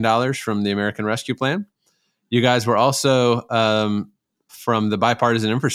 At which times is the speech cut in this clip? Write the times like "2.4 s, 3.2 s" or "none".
4.5 s